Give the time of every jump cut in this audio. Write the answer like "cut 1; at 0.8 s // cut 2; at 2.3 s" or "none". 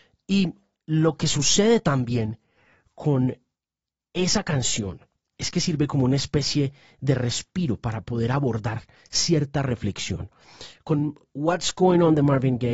none